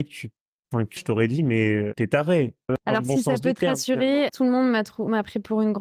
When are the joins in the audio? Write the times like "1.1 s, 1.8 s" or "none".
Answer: 1.0 s, 2.7 s, 4.3 s